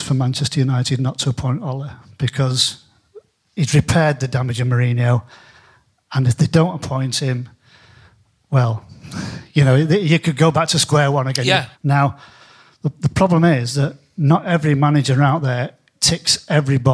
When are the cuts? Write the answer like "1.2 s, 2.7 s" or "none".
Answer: 11.7 s